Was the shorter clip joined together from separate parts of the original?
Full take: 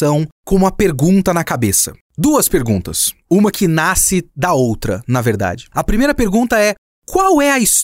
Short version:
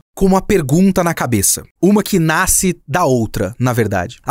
yes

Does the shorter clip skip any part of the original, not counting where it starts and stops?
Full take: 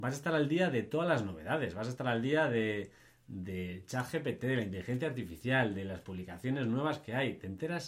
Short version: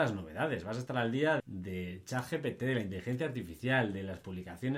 yes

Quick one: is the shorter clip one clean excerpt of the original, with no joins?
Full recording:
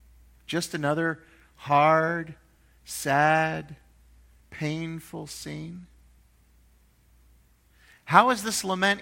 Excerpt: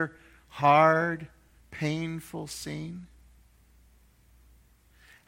no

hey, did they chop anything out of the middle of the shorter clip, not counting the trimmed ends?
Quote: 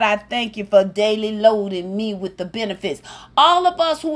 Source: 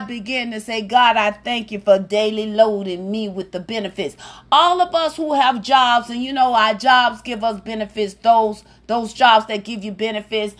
no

